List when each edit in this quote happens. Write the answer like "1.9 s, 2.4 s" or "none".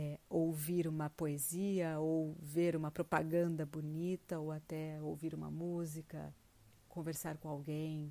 none

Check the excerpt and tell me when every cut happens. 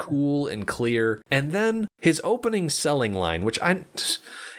none

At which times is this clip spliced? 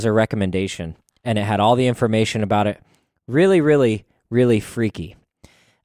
none

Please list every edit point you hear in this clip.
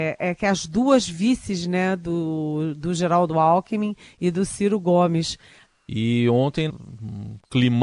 5.7 s, 6.7 s

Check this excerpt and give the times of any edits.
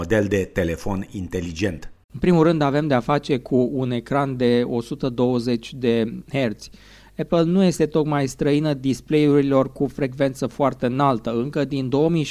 2.0 s

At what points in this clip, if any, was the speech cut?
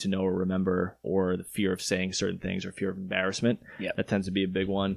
1.0 s

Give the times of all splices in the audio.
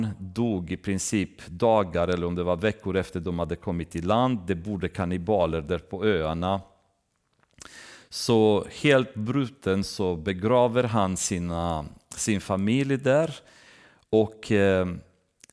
none

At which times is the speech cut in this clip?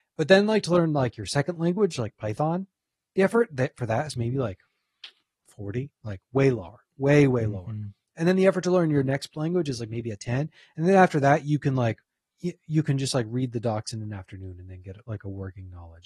none

